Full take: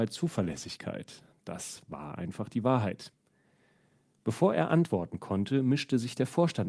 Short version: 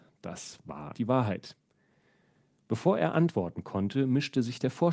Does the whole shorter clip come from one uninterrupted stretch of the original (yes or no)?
no